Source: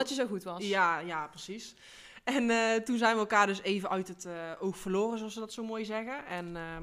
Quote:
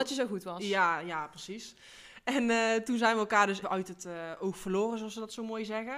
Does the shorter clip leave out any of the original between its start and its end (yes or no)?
yes